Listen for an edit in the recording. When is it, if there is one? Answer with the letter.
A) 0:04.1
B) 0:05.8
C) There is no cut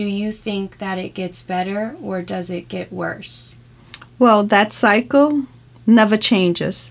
C